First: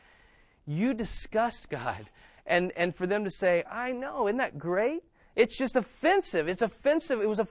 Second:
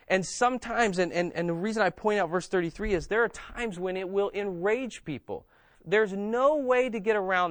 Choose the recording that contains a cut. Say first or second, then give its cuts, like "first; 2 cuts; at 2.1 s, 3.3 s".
second; 2 cuts; at 1.3 s, 5.7 s